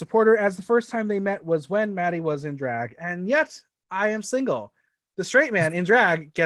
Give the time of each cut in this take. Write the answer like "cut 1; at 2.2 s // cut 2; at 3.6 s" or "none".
cut 1; at 4.2 s